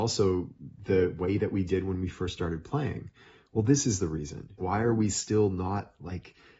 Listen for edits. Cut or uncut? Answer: cut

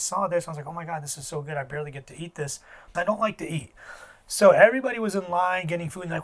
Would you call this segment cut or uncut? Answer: cut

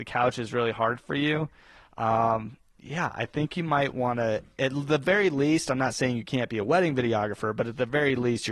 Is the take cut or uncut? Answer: uncut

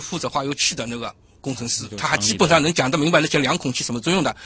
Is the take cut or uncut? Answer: uncut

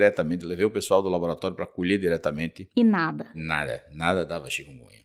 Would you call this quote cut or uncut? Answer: uncut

